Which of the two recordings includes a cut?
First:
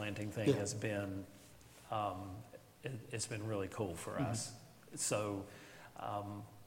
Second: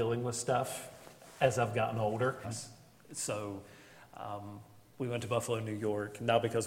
second; 1 cut; at 2.4 s

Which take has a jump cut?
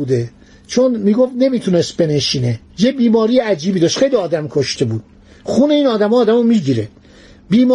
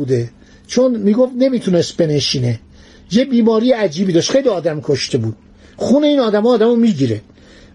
first; 1 cut; at 2.7 s

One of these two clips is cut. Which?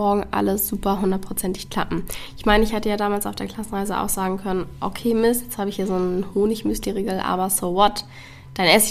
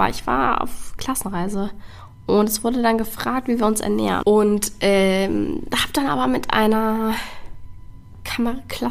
second; 1 cut; at 4.2 s

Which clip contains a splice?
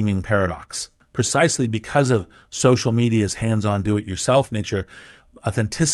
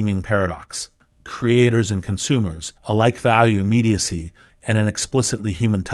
second; 3 cuts; at 1.1 s, 2.8 s, 4.5 s

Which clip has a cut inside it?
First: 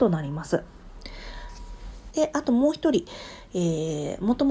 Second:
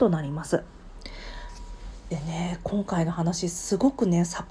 first; 1 cut; at 2.1 s

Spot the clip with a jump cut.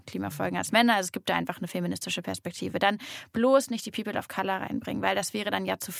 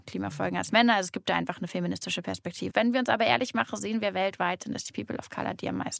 second; 1 cut; at 2.7 s

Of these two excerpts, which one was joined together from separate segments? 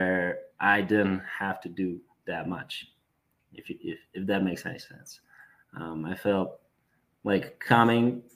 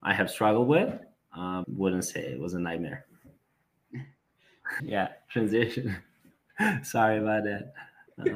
second; 2 cuts; at 1.6 s, 4.8 s

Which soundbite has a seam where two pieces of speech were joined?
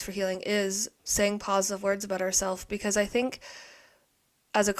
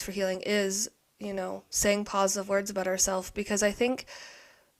first; 1 cut; at 1.0 s

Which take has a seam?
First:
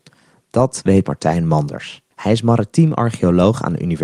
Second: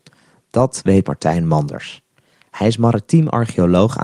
first; 1 cut; at 2.1 s

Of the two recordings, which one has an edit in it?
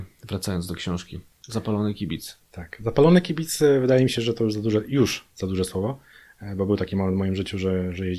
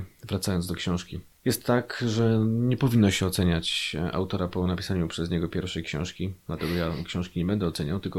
first; 2 cuts; at 1.4 s, 2.4 s

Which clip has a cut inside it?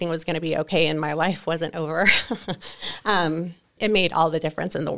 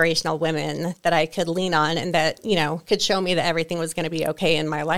first; 1 cut; at 3.8 s

